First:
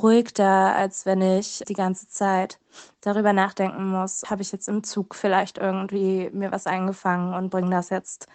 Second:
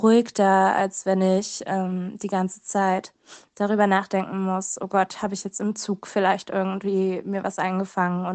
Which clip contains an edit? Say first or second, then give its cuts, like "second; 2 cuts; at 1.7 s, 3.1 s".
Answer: first; 2 cuts; at 1.6 s, 4.2 s